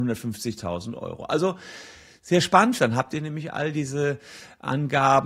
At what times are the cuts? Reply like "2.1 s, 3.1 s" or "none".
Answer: 2.8 s